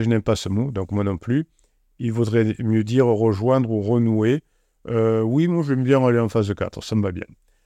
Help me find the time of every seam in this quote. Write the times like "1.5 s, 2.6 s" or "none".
none